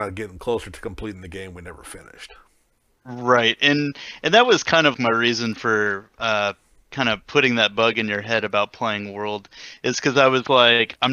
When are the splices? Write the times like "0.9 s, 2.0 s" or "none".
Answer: 4.9 s